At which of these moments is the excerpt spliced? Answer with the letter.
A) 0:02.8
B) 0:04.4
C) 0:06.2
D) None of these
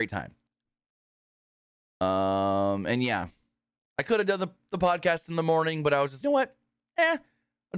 C